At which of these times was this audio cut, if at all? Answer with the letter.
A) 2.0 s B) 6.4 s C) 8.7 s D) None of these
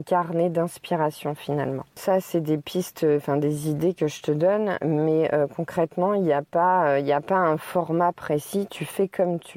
A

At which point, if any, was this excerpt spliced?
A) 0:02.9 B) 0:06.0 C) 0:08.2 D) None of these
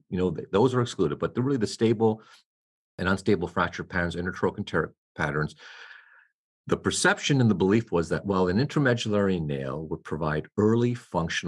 D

